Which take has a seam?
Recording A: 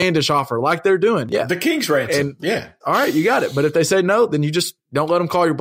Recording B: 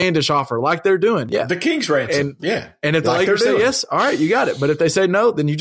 A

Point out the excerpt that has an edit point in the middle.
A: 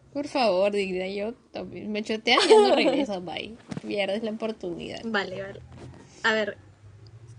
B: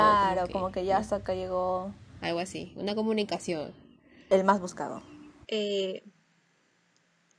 B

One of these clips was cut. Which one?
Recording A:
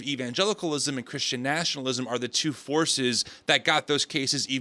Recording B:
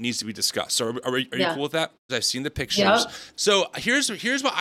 B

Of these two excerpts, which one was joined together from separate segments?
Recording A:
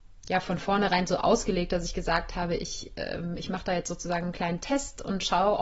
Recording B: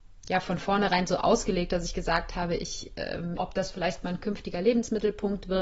B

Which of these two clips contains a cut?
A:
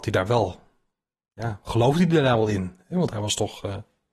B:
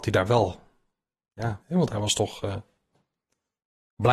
B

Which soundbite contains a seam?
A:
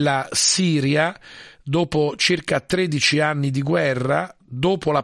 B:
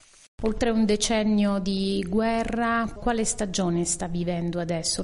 B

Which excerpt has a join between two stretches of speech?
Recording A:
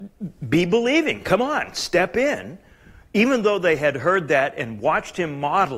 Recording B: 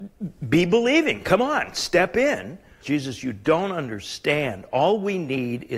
B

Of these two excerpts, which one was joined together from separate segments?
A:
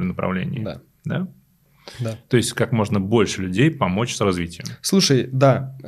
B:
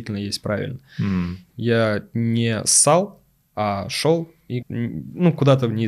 B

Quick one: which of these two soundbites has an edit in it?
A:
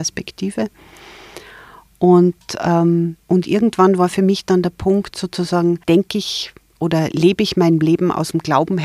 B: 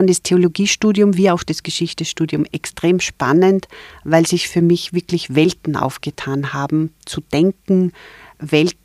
A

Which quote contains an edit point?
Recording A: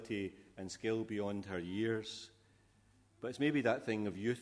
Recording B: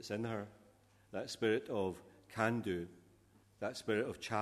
B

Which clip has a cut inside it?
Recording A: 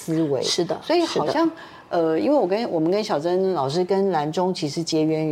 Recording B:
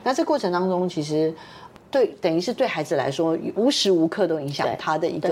B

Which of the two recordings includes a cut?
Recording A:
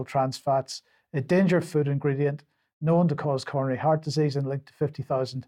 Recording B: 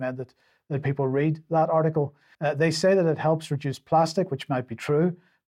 B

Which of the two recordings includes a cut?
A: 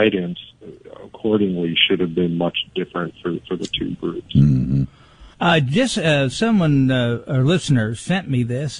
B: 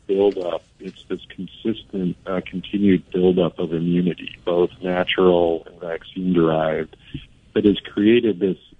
A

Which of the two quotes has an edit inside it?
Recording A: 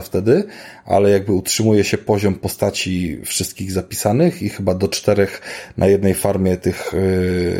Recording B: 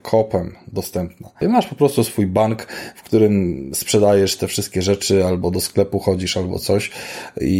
B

